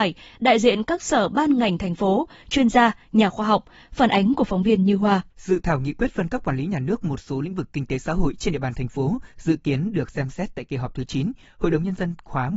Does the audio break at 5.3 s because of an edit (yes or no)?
yes